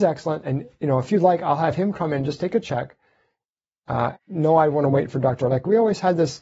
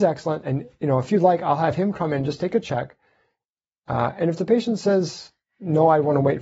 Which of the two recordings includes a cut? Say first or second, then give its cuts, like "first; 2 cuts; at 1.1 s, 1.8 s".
first; 2 cuts; at 4.1 s, 5.4 s